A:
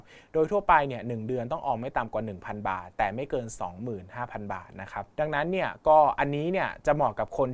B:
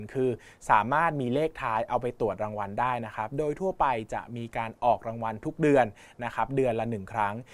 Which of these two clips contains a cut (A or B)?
A